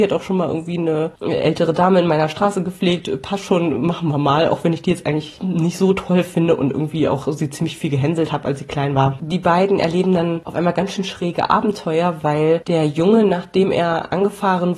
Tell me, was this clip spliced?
no; 0 cuts

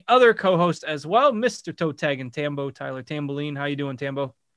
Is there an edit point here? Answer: no; 0 cuts

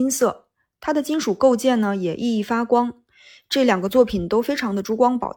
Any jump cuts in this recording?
no; 0 cuts

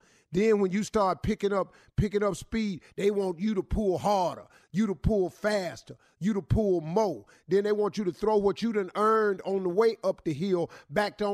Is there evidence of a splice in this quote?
no; 0 cuts

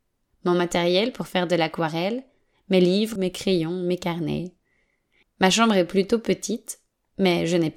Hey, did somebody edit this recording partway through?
yes; 2 cuts; at 3.2 s, 5.2 s

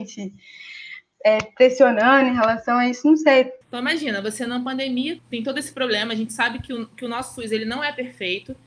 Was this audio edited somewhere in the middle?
yes; 2 cuts; at 3.6 s, 5.2 s

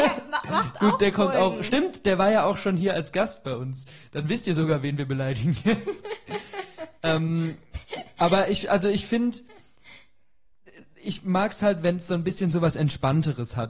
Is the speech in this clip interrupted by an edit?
no; 0 cuts

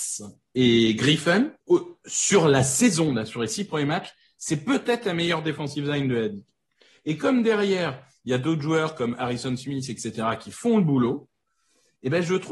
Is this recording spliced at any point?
yes; 1 cut; at 1.6 s

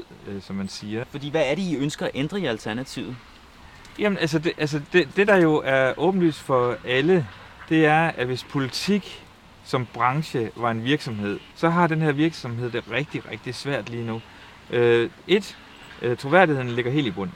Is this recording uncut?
no; 2 cuts; at 1.0 s, 11.5 s

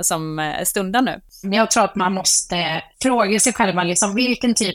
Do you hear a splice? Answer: yes; 2 cuts; at 1.4 s, 2.9 s

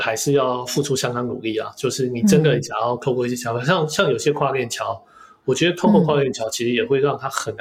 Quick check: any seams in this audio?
no; 0 cuts

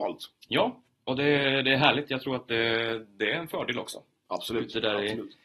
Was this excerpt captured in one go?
yes; 0 cuts

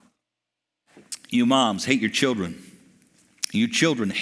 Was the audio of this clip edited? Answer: no; 0 cuts

